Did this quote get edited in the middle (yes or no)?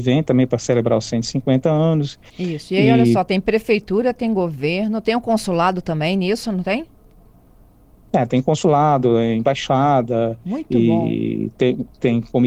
yes